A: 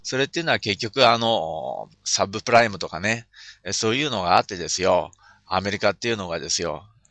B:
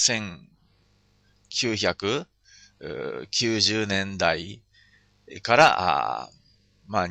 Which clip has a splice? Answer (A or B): A